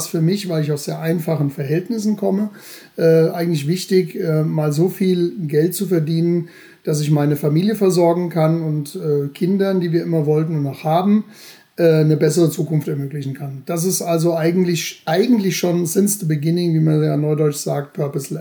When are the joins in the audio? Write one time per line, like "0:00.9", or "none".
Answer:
none